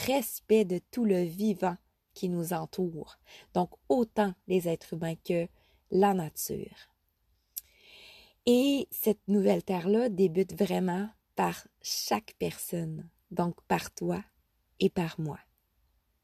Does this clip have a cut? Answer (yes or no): no